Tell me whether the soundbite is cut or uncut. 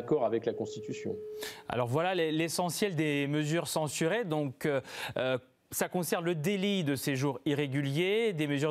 uncut